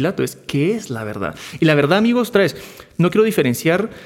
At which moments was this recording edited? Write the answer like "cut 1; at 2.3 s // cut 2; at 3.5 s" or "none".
none